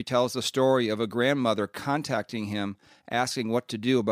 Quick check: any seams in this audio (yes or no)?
no